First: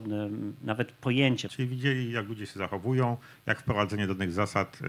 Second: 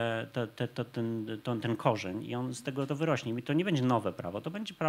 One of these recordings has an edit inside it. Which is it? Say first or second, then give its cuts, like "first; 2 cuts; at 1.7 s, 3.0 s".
first; 1 cut; at 1.5 s